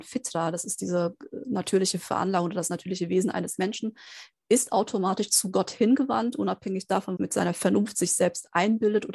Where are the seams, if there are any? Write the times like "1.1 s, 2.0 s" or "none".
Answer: 7.2 s